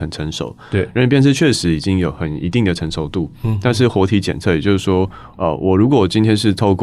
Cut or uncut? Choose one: uncut